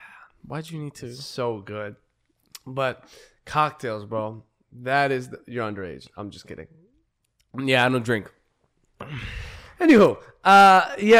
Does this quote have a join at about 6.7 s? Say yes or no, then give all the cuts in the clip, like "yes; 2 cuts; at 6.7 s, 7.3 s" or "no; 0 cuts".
no; 0 cuts